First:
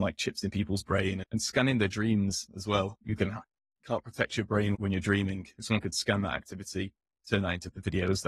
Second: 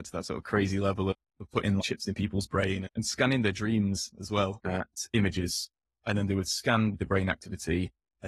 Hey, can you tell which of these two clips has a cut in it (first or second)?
second